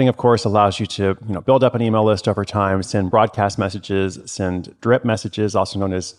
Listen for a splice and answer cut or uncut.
uncut